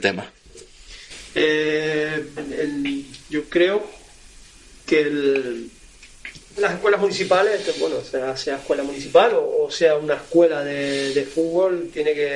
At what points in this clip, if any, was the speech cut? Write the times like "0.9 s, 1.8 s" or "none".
2.4 s, 6.6 s